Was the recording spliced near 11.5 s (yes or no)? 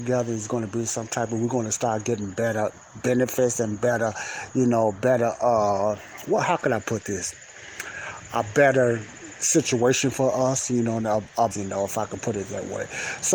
yes